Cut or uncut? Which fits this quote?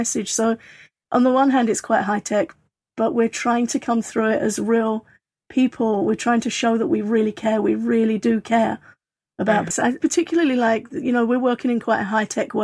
cut